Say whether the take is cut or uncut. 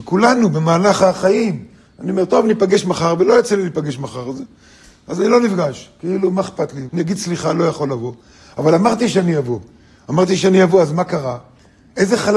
cut